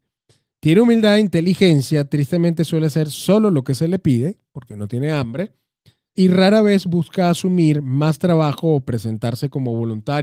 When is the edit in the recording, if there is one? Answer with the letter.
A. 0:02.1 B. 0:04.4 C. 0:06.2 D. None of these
C